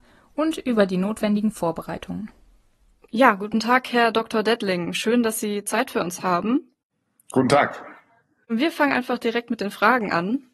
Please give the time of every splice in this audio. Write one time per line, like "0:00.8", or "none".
none